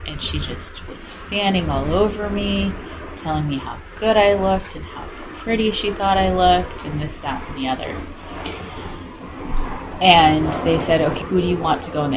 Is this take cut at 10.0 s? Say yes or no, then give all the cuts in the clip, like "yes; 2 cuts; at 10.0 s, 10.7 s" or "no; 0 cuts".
no; 1 cut; at 11.2 s